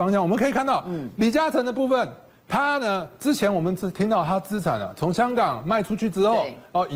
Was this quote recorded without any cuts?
yes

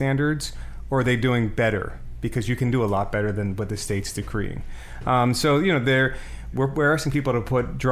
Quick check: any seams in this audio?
yes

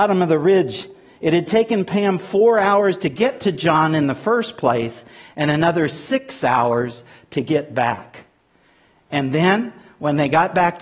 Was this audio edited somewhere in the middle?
no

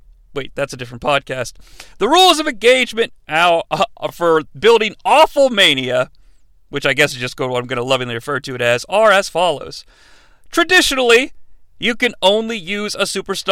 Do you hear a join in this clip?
no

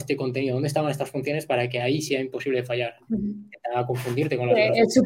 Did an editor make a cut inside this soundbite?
yes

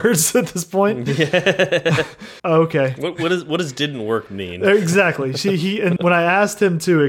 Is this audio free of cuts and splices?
no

